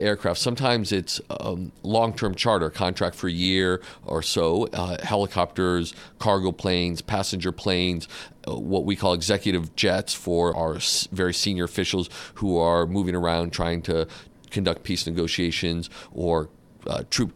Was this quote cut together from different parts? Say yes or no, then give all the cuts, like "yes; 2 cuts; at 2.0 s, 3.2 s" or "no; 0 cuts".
yes; 1 cut; at 10.5 s